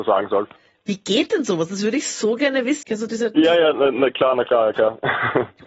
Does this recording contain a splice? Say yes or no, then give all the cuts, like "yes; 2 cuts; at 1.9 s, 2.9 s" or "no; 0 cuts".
yes; 1 cut; at 2.8 s